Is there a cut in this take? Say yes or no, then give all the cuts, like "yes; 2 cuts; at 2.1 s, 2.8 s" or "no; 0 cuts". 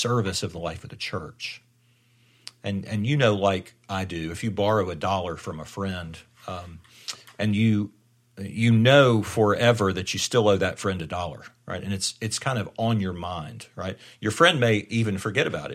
no; 0 cuts